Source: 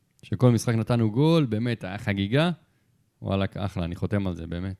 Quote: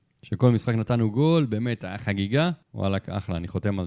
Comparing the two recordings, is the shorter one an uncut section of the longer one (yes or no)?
no